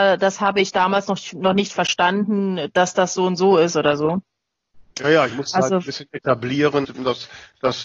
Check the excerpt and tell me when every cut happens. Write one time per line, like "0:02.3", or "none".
0:06.8